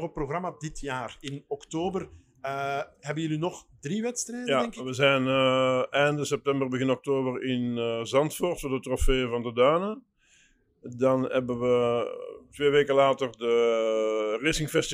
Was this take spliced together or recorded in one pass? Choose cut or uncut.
uncut